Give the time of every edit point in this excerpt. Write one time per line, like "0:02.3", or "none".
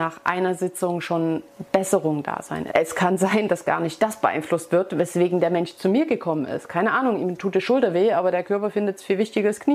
0:02.7